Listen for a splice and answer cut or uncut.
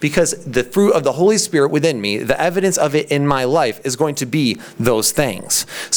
uncut